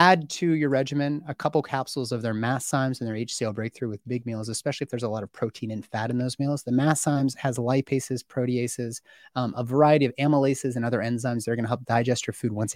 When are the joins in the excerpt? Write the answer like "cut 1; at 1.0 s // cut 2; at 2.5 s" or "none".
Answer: none